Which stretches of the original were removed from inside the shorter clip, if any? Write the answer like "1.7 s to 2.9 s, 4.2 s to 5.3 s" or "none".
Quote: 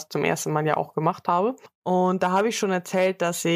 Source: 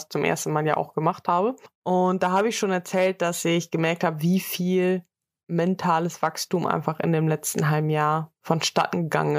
none